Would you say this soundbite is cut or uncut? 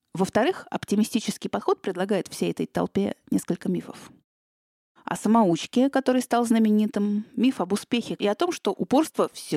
cut